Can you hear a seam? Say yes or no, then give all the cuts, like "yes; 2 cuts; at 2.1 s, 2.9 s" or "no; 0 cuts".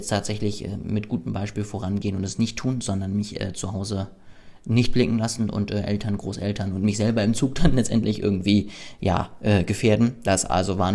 no; 0 cuts